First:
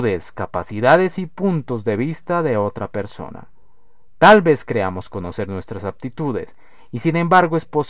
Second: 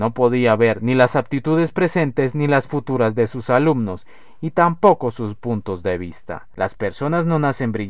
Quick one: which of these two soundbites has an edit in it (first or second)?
second